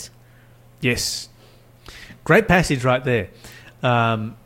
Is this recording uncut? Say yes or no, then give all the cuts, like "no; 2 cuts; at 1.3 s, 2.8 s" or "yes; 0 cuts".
yes; 0 cuts